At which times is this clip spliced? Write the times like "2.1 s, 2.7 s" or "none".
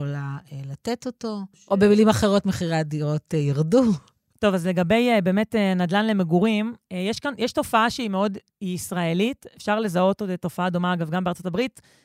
none